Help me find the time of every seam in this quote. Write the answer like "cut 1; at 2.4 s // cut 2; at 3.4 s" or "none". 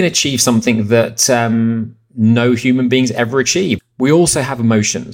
cut 1; at 3.8 s